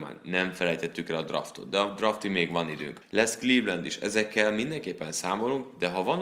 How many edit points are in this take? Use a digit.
1